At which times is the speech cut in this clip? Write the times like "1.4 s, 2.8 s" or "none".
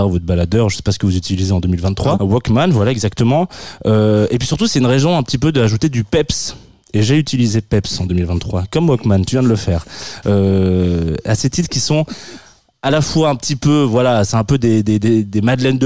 2.2 s